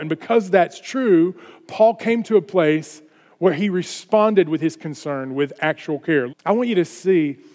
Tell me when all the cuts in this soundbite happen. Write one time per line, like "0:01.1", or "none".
0:06.3